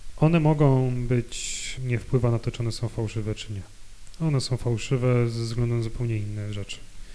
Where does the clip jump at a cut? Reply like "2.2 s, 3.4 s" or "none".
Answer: 1.8 s

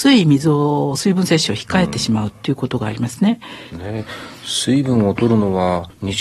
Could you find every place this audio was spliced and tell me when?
3.7 s

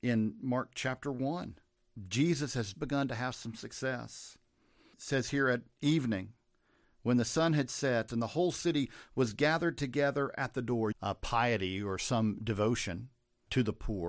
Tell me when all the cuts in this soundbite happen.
2.7 s, 8.1 s, 10.9 s

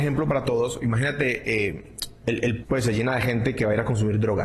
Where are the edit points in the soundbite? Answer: 2.6 s

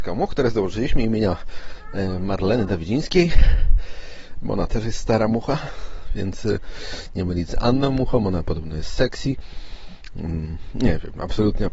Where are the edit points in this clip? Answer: none

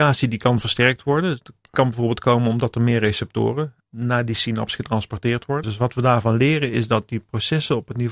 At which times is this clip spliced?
3.8 s, 5.6 s

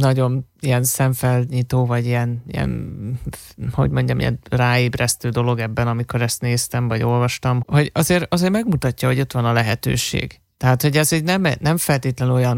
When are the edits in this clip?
7.6 s

